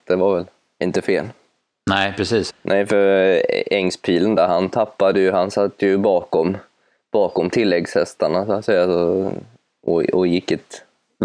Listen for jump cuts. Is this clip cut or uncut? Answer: cut